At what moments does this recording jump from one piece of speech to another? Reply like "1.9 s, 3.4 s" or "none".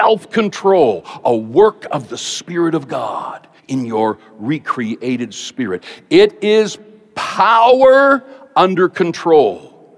3.6 s